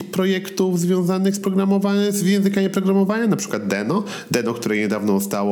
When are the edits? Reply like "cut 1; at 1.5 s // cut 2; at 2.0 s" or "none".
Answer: none